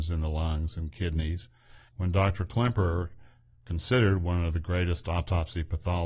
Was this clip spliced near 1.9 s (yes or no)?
yes